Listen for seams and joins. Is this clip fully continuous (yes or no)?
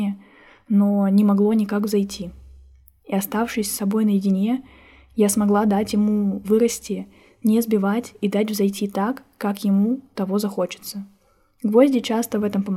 yes